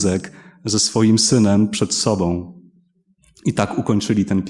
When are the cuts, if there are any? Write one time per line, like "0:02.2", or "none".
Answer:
none